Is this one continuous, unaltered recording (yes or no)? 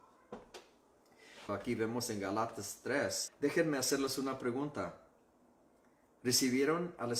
no